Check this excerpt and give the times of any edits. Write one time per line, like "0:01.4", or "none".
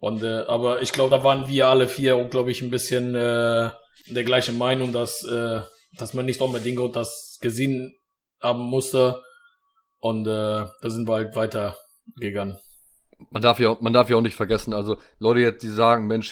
none